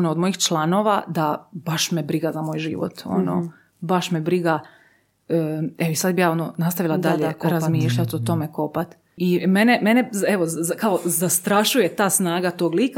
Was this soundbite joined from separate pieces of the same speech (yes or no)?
yes